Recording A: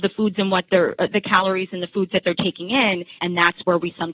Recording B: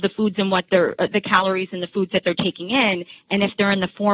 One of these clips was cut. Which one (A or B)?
A